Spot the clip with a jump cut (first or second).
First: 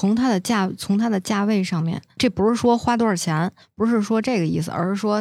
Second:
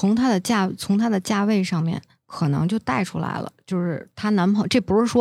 first